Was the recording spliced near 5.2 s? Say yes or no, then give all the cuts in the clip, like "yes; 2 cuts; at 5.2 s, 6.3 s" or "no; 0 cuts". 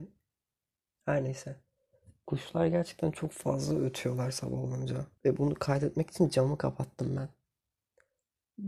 yes; 1 cut; at 5.2 s